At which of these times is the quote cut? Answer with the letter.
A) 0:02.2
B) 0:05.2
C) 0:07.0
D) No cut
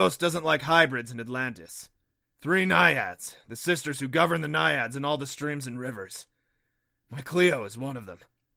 A